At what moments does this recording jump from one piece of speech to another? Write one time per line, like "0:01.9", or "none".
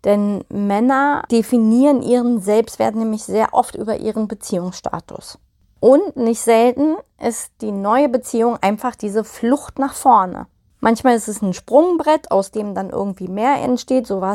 none